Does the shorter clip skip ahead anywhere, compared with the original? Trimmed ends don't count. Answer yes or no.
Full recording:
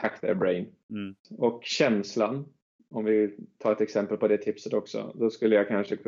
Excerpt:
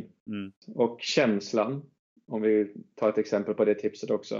no